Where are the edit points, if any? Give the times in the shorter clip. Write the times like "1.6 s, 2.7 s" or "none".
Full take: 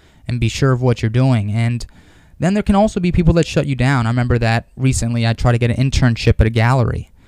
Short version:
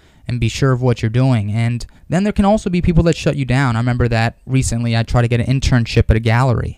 2.0 s